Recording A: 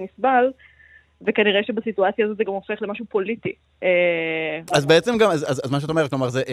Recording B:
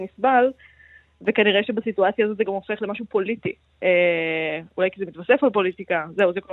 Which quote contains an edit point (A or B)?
A